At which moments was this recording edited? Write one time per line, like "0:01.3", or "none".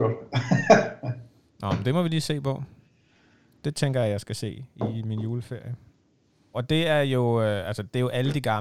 0:03.6
0:06.5